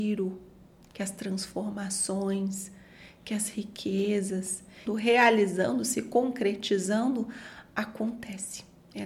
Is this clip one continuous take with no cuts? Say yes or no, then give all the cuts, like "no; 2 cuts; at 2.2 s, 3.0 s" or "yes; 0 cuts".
no; 1 cut; at 4.9 s